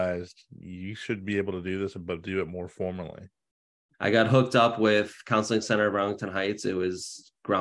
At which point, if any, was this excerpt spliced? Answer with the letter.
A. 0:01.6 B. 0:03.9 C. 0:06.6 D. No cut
B